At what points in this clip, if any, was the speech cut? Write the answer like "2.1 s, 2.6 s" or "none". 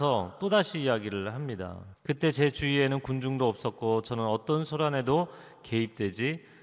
1.9 s